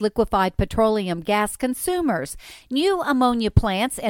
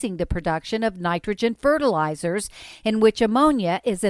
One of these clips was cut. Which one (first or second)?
first